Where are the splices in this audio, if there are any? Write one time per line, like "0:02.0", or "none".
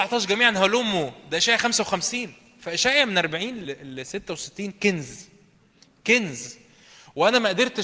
0:03.6